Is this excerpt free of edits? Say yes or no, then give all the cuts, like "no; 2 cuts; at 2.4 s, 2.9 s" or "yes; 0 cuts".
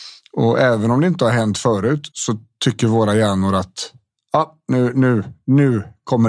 no; 1 cut; at 2.1 s